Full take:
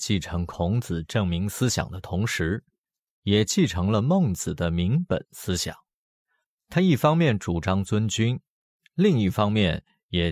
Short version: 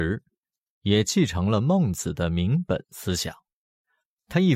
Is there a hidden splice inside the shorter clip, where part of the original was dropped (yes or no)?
no